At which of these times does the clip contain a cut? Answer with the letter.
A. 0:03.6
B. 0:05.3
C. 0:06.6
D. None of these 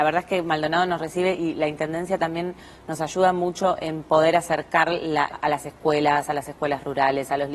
B